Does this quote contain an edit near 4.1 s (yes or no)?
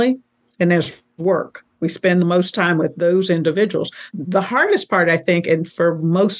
yes